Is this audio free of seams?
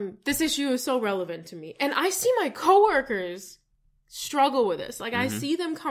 yes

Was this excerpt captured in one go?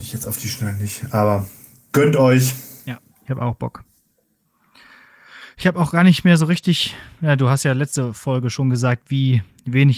no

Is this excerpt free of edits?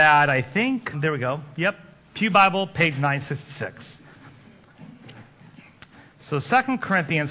no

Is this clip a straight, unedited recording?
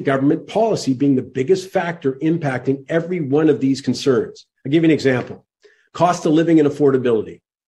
yes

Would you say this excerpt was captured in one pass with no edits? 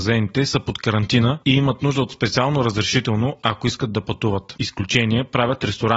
no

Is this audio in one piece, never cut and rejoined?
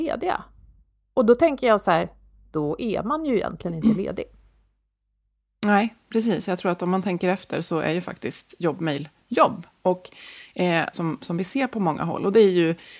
no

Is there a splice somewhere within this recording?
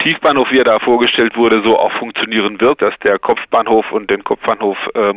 yes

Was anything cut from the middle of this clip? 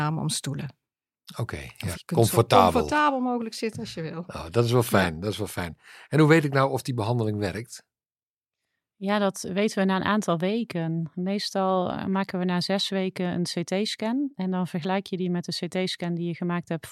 yes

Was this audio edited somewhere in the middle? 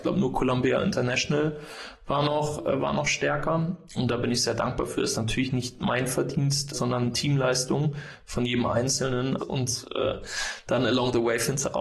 yes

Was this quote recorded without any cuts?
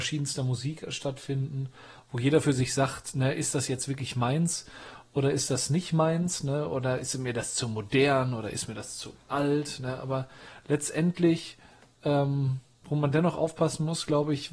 yes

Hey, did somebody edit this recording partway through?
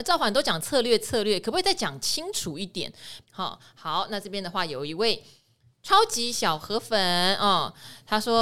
yes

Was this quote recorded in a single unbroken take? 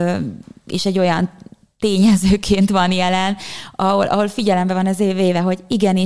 yes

